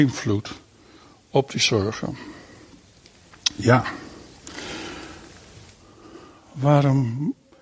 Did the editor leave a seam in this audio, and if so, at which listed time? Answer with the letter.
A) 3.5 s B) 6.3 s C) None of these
C